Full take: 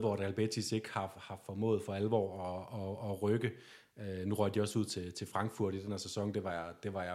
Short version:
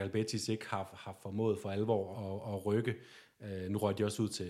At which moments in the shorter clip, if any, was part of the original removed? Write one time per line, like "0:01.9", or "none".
0:02.1